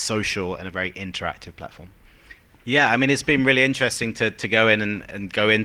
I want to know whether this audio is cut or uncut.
cut